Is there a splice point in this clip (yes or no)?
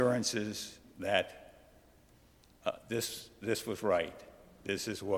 no